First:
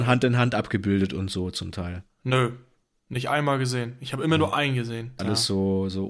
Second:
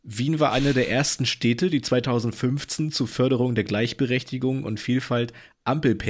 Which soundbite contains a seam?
first; 1 cut; at 5.2 s

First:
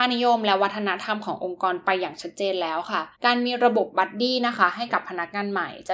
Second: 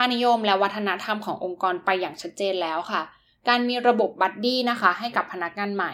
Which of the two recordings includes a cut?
first; 1 cut; at 3.1 s

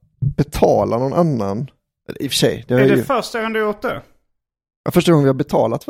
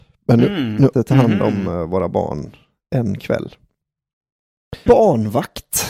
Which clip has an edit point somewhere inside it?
second; 2 cuts; at 0.9 s, 4.9 s

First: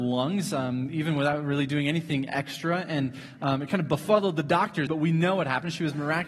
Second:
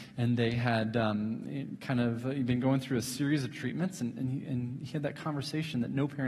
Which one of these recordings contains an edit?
first; 1 cut; at 4.9 s

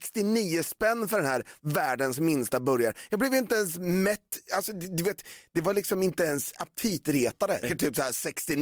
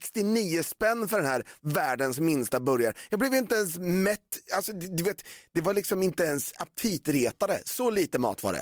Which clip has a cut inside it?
first; 1 cut; at 7.6 s

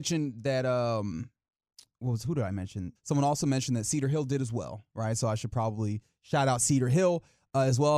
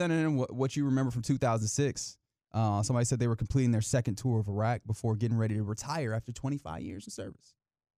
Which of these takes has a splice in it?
first; 1 cut; at 3.0 s

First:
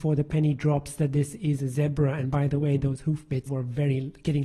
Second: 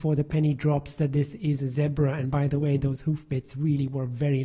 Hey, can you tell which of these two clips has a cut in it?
first; 1 cut; at 3.5 s

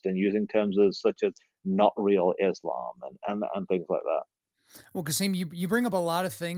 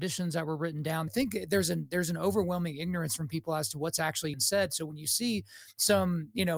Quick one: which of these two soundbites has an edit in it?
second; 2 cuts; at 1.1 s, 4.3 s

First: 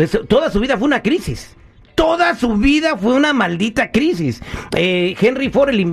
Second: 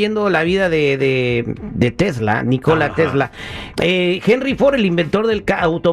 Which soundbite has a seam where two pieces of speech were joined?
second; 1 cut; at 3.7 s

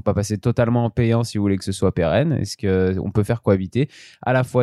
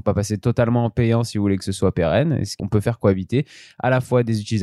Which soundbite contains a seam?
second; 1 cut; at 2.6 s

